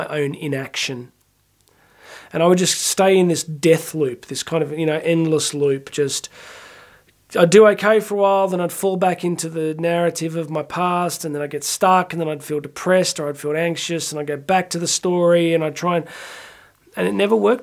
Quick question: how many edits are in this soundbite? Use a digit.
0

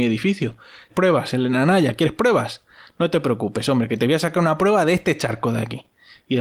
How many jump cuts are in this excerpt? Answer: 1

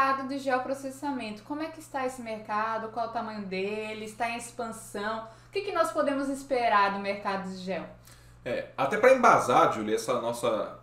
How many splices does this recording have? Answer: 0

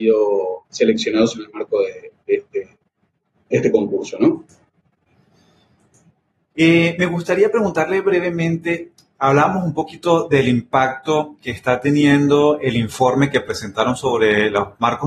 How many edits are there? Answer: 1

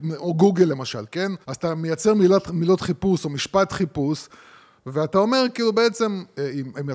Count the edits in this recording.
1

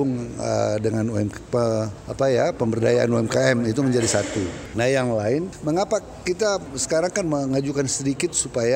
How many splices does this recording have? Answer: 1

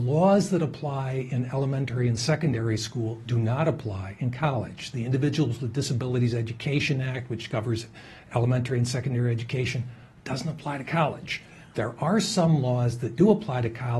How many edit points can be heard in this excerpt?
0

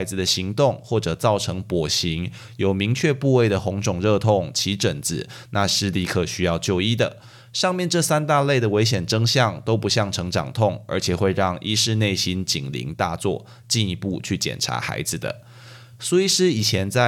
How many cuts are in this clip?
0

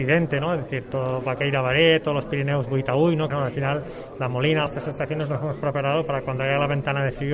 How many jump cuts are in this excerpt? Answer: 2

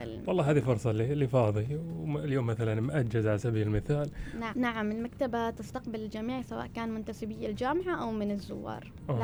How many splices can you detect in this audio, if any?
1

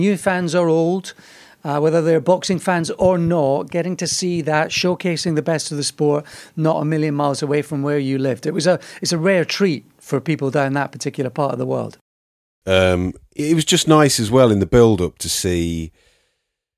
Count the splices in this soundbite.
1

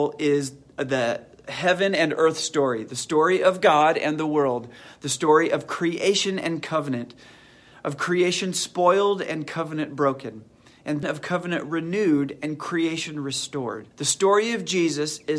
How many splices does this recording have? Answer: 2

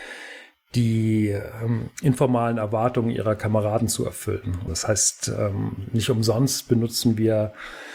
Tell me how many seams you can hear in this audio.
1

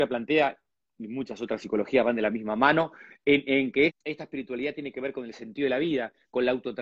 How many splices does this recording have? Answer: 1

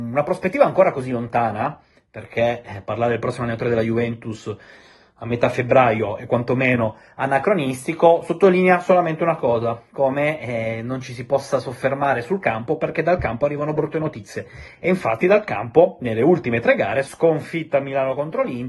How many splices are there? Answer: 1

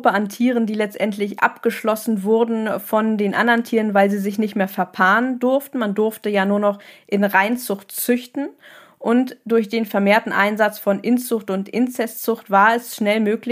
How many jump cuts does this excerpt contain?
0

